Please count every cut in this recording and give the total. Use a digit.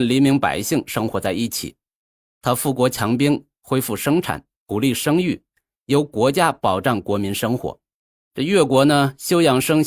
0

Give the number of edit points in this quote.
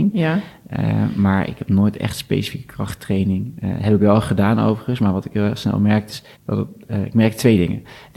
1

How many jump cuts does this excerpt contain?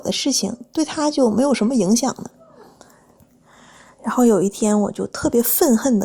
0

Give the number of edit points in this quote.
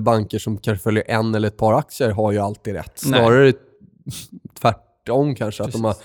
0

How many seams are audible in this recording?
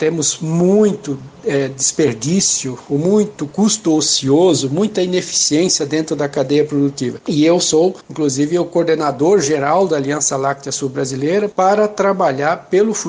1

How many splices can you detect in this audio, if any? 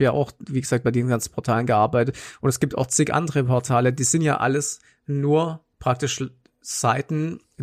1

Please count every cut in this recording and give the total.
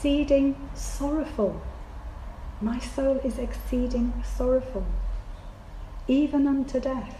0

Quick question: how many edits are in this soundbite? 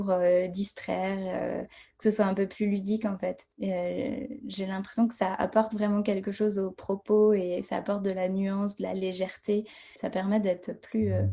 2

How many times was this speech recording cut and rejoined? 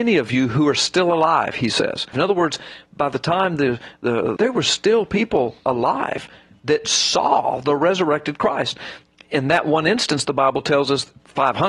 2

